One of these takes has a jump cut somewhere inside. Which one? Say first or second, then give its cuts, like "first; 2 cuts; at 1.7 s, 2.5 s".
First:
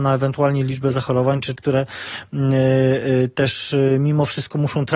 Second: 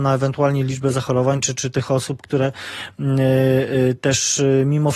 first; 1 cut; at 1.6 s